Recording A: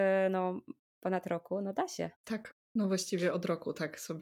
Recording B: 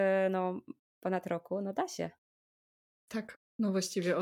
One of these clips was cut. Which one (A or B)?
A